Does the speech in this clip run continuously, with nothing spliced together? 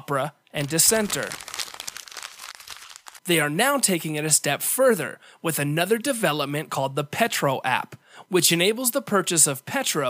no; 1 cut; at 3.2 s

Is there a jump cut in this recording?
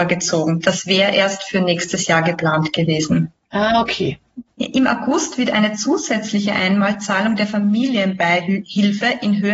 yes; 1 cut; at 4.5 s

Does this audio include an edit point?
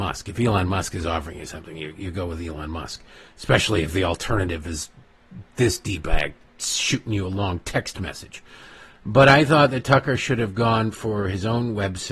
no; 0 cuts

